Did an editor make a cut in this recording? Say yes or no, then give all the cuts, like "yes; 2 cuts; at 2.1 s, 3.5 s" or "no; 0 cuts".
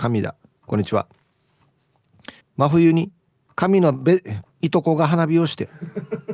yes; 2 cuts; at 2.4 s, 4.4 s